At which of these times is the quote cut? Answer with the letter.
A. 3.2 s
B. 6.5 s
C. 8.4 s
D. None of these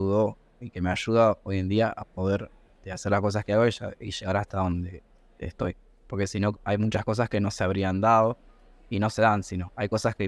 B